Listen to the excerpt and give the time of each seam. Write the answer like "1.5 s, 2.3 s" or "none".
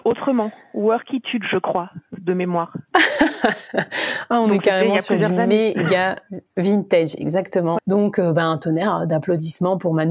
6.5 s, 7.8 s